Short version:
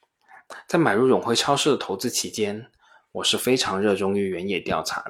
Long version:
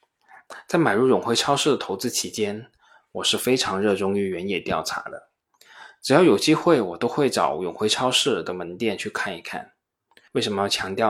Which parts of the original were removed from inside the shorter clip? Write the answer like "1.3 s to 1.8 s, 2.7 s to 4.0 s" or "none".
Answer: none